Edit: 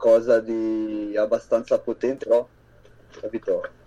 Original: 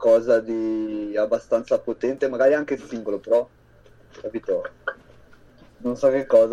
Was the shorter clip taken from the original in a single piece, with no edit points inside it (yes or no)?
no